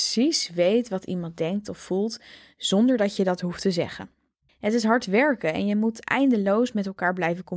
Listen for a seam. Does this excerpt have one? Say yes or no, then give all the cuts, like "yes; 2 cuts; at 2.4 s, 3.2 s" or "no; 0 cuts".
yes; 1 cut; at 4.5 s